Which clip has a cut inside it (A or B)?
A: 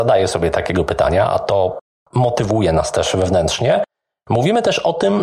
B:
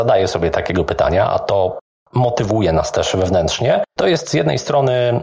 B